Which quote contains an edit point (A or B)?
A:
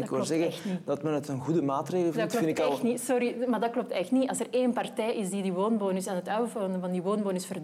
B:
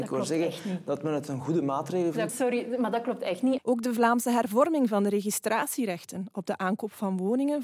B